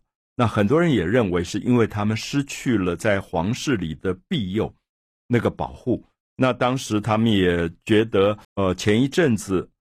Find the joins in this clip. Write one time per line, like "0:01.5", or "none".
0:06.2
0:08.4

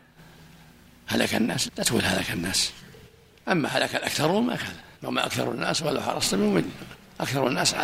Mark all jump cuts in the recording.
0:01.7
0:04.9

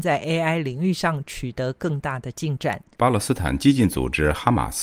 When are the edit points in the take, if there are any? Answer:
0:03.0

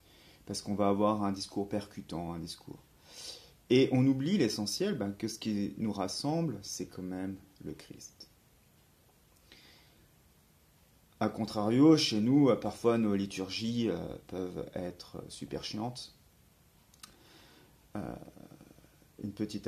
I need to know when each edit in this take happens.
none

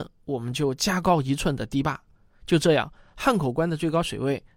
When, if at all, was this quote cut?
none

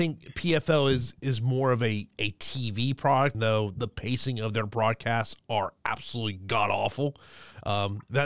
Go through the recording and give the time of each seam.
0:03.3

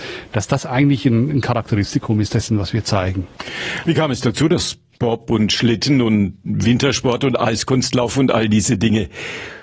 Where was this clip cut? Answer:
none

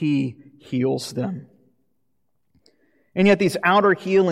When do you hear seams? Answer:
none

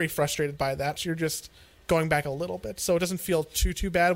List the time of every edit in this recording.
0:01.0

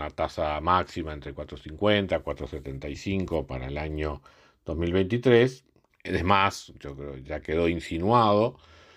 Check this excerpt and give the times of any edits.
0:05.9
0:07.2

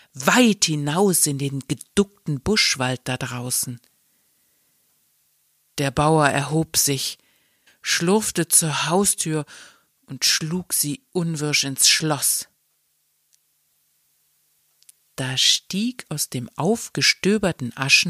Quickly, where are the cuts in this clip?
0:07.7

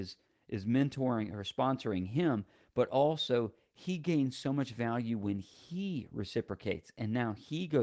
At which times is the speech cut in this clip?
none

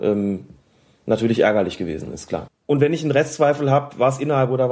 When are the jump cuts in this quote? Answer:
0:02.5

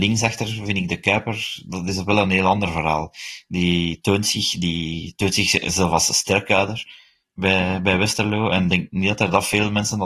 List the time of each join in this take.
none

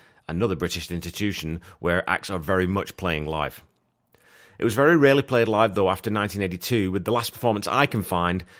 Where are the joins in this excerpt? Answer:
none

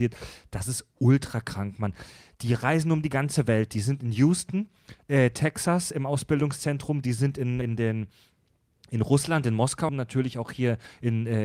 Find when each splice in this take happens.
0:07.6
0:09.9

